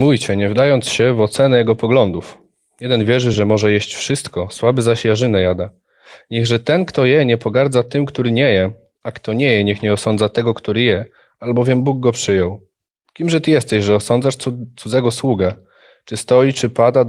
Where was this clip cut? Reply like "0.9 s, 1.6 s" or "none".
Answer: none